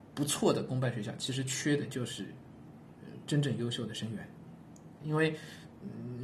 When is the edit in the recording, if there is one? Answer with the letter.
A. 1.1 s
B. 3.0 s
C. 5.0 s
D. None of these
C